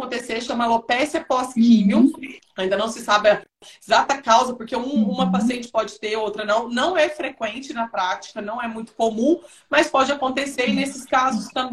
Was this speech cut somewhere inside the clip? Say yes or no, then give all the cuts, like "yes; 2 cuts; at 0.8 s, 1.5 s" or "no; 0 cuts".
no; 0 cuts